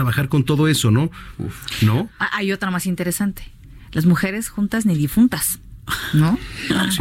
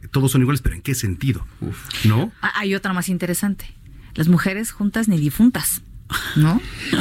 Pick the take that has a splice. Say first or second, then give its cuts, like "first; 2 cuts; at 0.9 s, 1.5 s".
first; 1 cut; at 1.3 s